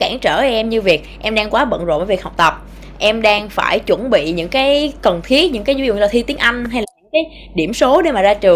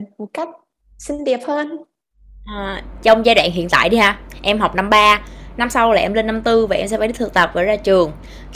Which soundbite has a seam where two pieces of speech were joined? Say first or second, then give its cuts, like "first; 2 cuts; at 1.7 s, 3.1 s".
second; 1 cut; at 2.9 s